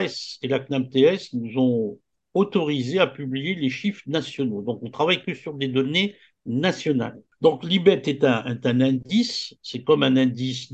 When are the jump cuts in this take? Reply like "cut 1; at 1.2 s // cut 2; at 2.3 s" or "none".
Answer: none